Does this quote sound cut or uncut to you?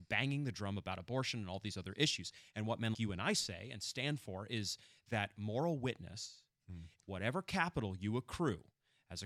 cut